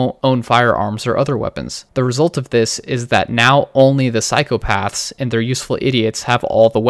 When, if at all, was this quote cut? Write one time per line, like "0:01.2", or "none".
none